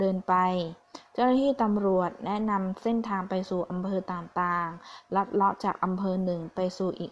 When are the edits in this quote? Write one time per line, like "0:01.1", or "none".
none